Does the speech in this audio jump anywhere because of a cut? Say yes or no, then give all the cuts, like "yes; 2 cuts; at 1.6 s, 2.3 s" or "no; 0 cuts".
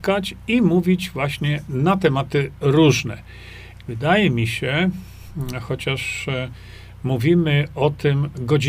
yes; 1 cut; at 3.8 s